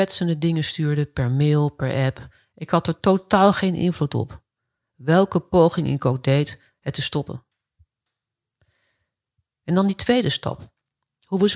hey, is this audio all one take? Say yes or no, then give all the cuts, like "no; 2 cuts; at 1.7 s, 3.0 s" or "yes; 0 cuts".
yes; 0 cuts